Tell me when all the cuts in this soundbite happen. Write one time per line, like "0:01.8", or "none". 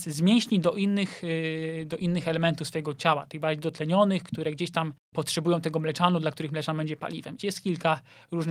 0:07.4